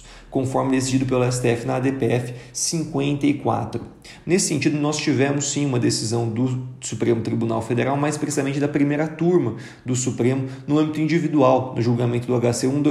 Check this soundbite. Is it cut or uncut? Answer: cut